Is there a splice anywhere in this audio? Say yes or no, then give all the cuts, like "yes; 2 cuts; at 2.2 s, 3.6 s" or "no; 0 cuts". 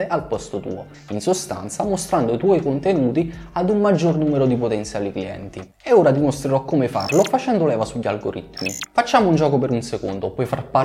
no; 0 cuts